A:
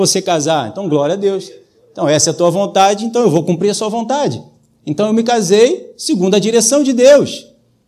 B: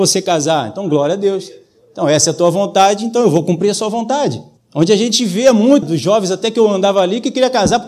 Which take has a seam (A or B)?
B